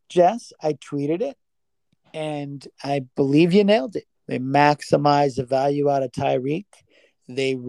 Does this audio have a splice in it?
yes; 1 cut; at 4.1 s

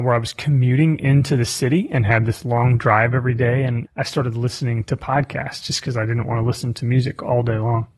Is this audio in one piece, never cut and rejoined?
no; 1 cut; at 3.9 s

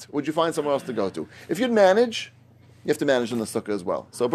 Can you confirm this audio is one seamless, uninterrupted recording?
yes; 0 cuts

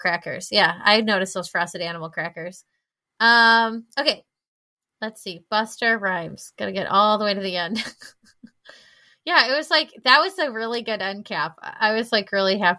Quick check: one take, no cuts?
yes; 0 cuts

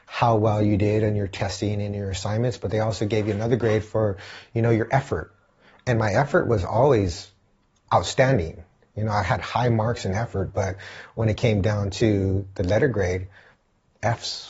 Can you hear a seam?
no; 0 cuts

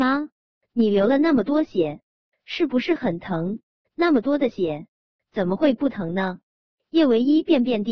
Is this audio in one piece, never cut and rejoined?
no; 2 cuts; at 3.8 s, 6.7 s

